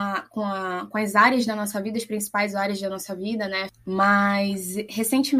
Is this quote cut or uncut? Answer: cut